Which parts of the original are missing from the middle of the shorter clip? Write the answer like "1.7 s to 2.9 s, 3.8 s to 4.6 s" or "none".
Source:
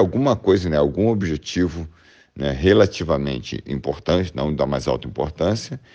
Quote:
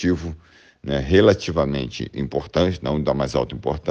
none